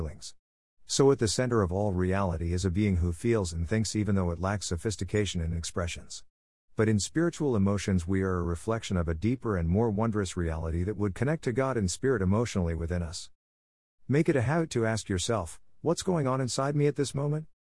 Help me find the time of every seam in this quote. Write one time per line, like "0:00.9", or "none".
none